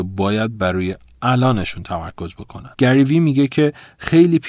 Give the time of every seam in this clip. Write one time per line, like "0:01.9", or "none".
0:02.7